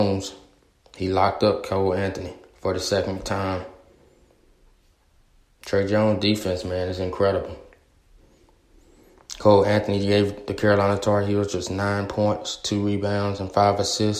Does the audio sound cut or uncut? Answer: uncut